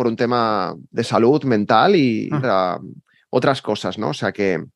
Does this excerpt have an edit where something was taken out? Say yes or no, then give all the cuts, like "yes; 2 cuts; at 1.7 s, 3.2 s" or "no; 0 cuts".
yes; 1 cut; at 2.4 s